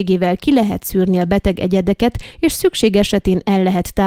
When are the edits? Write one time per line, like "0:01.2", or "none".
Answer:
none